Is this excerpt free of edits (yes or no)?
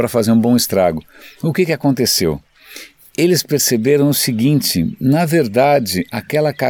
yes